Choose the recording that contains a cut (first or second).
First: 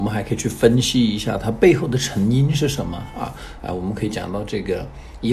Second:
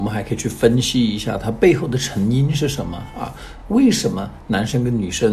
first